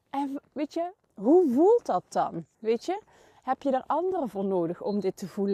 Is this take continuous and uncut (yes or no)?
no